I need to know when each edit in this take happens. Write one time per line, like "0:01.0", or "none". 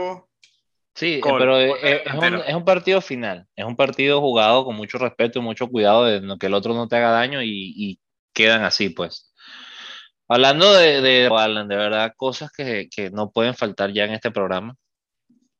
0:11.3